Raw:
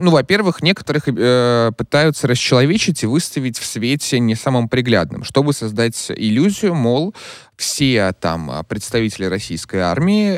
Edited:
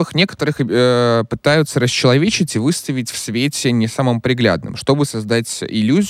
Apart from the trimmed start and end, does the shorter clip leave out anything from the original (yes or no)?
no